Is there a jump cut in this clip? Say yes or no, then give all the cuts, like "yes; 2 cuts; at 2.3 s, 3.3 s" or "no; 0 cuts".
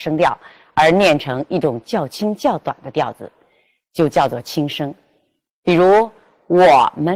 no; 0 cuts